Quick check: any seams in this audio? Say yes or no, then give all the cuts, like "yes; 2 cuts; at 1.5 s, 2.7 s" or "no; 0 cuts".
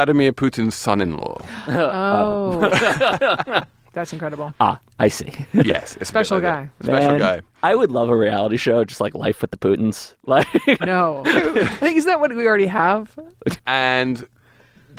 yes; 2 cuts; at 10.8 s, 13.6 s